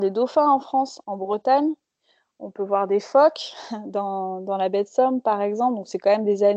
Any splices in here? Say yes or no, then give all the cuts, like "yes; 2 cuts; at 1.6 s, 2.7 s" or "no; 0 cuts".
no; 0 cuts